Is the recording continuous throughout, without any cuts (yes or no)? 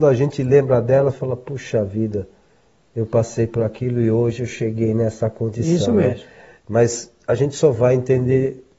yes